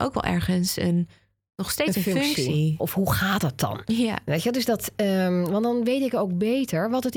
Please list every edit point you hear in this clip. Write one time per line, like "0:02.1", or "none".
0:02.8